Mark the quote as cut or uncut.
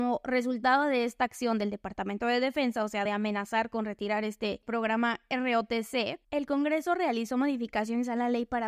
uncut